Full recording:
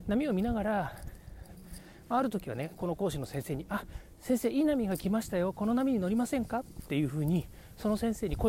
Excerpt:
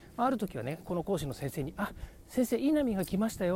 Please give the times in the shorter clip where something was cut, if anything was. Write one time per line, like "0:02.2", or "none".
none

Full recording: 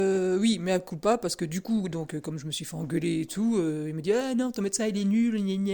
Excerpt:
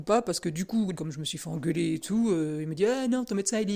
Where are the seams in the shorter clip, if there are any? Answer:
0:00.9

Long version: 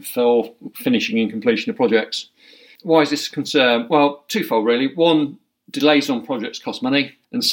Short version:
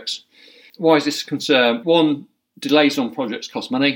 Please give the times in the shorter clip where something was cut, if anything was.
0:01.8

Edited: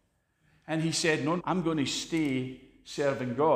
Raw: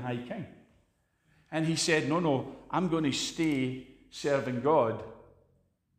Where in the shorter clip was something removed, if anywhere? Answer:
0:01.4

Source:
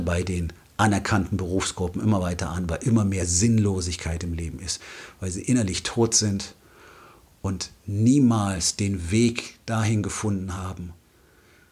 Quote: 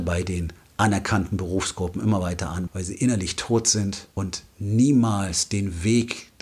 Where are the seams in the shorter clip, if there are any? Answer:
0:02.7
0:04.1

